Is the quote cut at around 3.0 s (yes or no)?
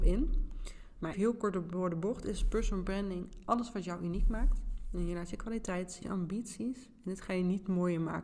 no